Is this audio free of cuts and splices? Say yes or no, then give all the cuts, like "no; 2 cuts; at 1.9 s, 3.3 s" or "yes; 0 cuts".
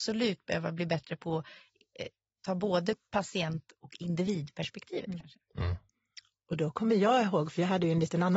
yes; 0 cuts